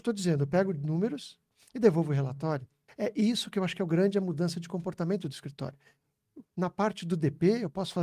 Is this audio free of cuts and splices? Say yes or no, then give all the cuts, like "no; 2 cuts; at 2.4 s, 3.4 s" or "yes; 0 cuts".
no; 2 cuts; at 2.9 s, 6.5 s